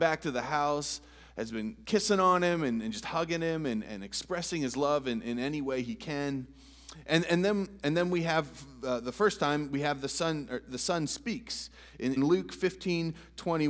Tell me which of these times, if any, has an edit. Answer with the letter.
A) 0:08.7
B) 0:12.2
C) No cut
B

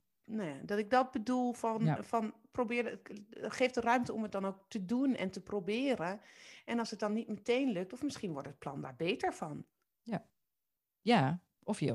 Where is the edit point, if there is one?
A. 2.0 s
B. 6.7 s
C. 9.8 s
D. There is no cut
D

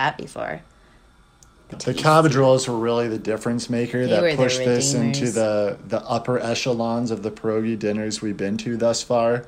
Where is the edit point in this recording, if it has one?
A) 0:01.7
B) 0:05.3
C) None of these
A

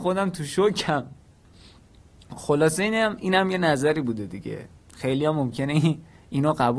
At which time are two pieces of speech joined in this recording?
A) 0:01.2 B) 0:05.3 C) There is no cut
C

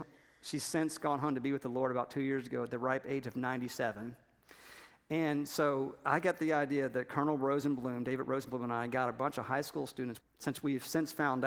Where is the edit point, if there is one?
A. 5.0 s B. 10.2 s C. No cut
B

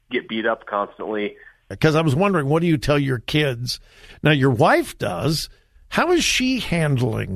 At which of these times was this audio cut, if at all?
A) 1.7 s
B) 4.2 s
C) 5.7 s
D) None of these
A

